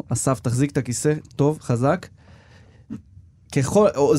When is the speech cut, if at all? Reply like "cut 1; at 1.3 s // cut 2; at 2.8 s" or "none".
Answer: none